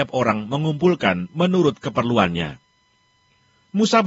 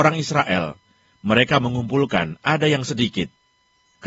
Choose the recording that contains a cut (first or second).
second